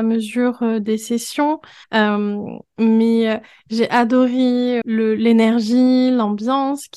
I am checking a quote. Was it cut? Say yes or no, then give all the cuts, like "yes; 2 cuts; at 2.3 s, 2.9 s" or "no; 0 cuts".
yes; 2 cuts; at 1.8 s, 4.8 s